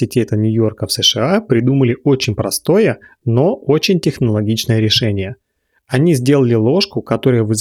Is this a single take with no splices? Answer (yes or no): yes